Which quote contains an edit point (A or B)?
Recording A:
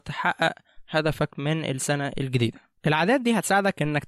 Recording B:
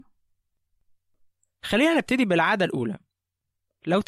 A